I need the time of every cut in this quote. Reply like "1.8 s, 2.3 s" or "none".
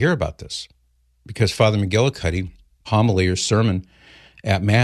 2.9 s